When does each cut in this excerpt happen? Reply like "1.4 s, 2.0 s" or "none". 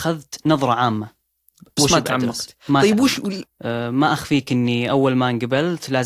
3.4 s